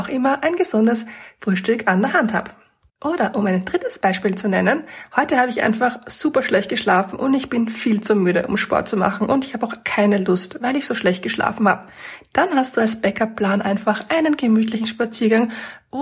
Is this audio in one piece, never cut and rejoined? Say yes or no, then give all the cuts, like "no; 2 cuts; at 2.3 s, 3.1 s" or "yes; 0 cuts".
no; 1 cut; at 9.8 s